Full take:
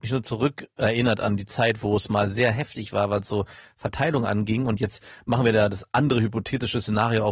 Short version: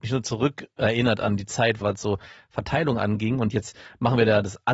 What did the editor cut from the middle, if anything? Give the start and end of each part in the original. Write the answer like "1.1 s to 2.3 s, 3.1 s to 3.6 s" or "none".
1.8 s to 3.1 s